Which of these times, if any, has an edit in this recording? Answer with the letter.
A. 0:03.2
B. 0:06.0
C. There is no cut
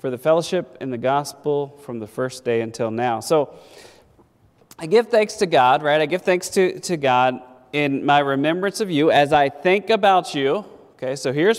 C